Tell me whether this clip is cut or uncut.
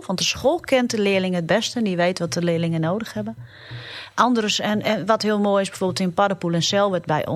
uncut